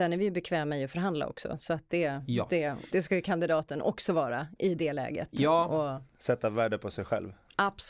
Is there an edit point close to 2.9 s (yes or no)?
yes